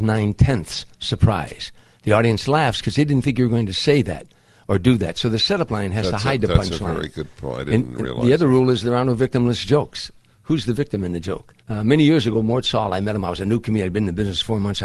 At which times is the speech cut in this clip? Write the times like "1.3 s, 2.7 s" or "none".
11.6 s